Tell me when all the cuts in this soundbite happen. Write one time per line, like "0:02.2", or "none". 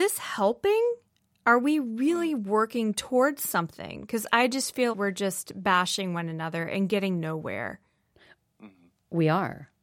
0:04.9